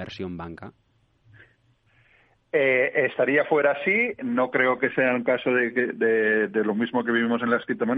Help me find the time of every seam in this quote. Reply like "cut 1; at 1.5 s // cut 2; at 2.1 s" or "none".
none